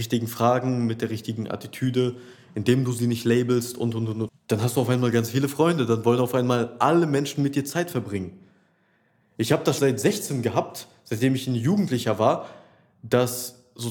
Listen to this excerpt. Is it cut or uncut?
cut